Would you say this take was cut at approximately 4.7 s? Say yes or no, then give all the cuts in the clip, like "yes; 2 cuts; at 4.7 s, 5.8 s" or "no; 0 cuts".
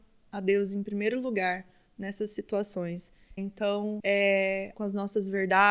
yes; 2 cuts; at 3.4 s, 4.7 s